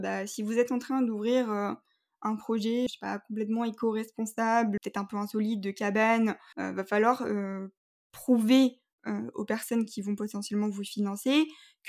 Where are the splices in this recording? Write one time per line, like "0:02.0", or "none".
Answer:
0:02.9
0:04.8
0:06.5